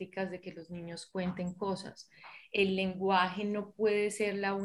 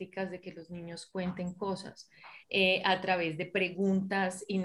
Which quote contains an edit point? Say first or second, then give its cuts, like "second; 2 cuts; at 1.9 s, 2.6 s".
second; 1 cut; at 2.4 s